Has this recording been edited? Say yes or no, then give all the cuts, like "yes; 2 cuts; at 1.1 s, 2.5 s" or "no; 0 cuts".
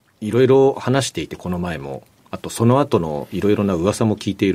no; 0 cuts